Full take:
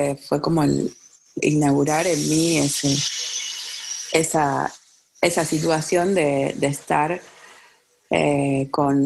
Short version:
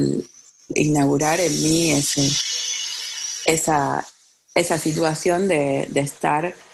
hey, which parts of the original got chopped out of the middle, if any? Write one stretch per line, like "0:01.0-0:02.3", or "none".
none